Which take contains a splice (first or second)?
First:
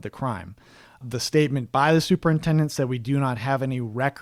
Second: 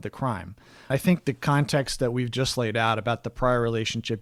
second